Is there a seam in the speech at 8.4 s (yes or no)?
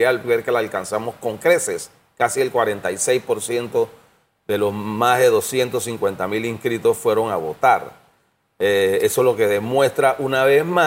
no